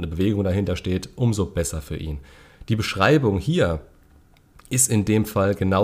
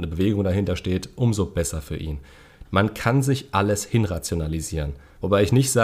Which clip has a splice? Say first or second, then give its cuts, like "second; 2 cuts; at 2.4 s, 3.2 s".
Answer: second; 1 cut; at 2.6 s